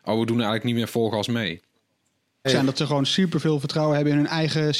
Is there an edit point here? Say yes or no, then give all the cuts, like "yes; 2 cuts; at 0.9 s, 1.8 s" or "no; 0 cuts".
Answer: yes; 1 cut; at 2.4 s